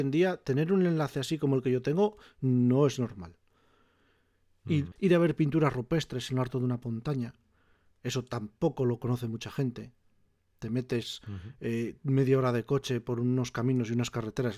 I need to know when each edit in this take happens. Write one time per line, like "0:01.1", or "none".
0:04.9